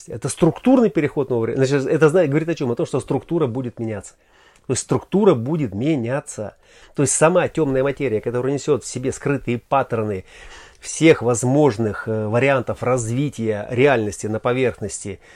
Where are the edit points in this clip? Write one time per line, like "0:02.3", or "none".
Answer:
none

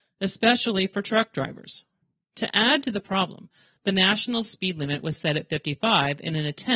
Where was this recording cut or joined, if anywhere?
none

